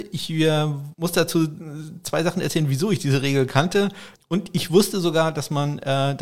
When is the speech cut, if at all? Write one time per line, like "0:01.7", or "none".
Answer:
0:04.2